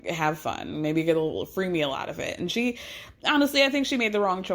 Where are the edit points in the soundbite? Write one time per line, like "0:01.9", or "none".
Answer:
none